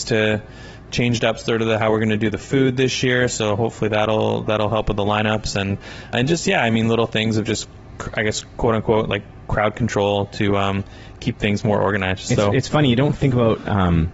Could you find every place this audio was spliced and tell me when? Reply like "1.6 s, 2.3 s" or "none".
6.1 s